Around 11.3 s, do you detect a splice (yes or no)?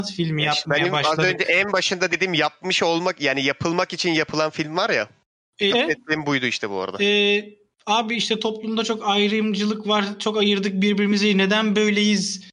no